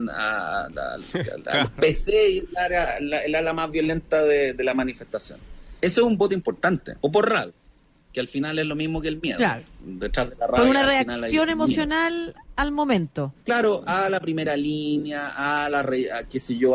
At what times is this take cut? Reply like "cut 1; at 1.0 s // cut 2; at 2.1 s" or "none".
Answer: cut 1; at 5.8 s // cut 2; at 7.0 s